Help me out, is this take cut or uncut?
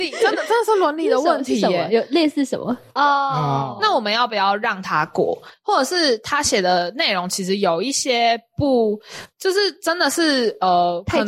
cut